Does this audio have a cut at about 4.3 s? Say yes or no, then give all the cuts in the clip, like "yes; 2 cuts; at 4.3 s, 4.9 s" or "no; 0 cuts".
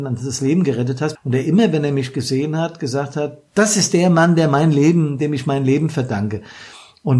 no; 1 cut; at 1.1 s